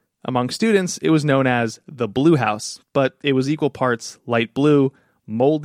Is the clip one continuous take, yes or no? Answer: yes